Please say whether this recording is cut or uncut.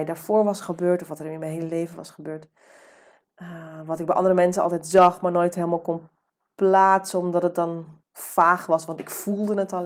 cut